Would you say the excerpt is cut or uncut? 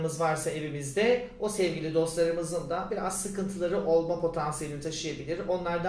uncut